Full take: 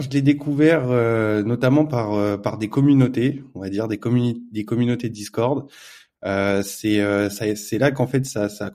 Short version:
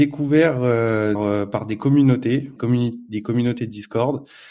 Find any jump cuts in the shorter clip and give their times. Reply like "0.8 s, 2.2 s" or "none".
1.2 s, 2.6 s